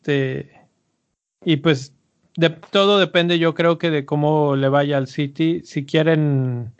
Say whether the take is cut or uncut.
uncut